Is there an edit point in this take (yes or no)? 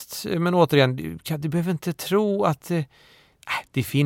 no